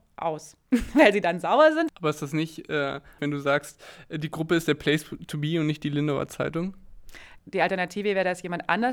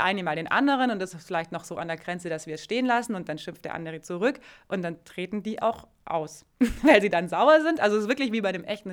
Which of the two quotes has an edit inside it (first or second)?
first